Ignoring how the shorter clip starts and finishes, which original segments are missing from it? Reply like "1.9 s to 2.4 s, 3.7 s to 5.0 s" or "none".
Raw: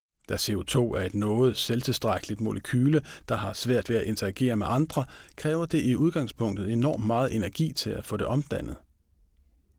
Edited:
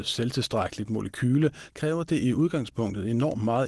3.2 s to 5.3 s